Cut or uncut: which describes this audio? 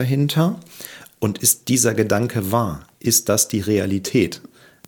cut